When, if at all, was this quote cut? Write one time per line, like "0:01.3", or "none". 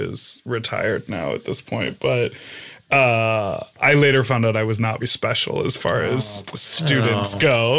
0:05.0